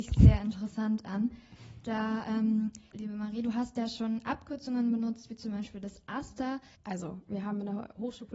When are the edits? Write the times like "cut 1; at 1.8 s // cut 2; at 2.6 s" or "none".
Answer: cut 1; at 2.9 s // cut 2; at 6.7 s